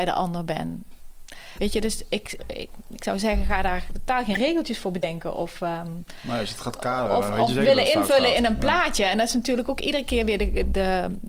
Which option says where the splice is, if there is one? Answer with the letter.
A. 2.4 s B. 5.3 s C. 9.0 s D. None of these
A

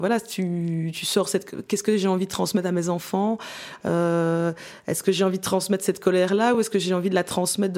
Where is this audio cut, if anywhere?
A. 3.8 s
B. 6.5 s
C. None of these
C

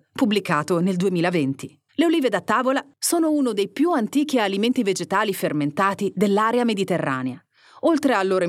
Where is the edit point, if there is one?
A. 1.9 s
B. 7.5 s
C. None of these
A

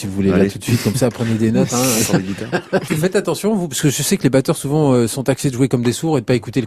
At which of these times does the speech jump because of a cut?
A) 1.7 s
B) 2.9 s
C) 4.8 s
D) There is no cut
B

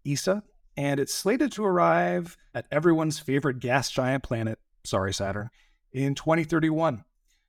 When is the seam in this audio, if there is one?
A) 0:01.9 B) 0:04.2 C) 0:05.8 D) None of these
D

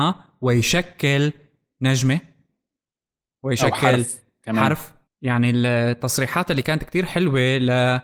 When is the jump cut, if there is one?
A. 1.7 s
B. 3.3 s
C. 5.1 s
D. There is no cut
C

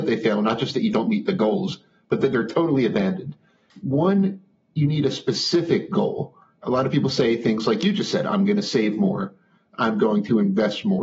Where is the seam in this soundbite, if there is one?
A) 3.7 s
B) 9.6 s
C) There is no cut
A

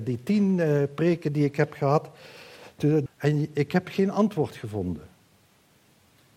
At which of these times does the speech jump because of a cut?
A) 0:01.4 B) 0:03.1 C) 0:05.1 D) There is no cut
B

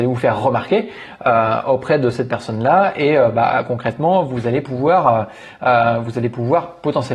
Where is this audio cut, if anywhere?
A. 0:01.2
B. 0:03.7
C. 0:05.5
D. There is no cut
D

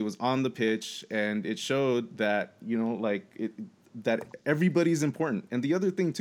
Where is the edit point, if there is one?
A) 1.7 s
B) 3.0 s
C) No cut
C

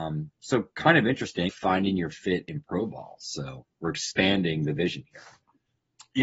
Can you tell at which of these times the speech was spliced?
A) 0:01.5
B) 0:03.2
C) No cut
A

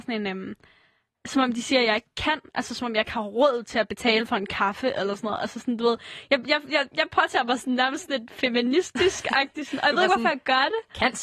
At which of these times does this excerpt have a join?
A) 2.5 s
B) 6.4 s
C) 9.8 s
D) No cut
D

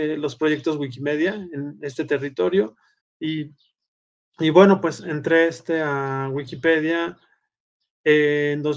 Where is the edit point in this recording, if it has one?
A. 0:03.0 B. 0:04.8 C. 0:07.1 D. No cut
A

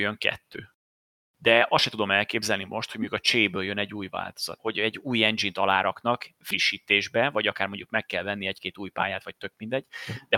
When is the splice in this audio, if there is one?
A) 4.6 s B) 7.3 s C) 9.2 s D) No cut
A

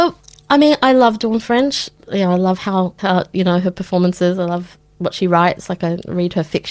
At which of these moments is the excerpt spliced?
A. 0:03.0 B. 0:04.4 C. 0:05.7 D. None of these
A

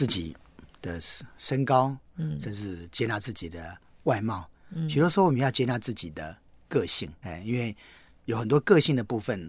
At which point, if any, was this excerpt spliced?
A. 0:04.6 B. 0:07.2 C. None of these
B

